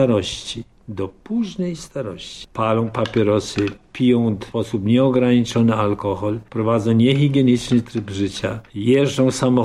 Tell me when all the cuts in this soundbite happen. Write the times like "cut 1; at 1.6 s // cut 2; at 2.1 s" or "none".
cut 1; at 2.4 s